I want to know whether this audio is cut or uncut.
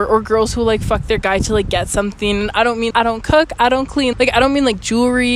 cut